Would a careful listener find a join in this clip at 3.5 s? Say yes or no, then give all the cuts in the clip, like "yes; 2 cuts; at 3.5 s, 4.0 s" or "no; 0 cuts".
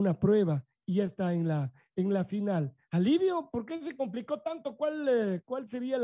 no; 0 cuts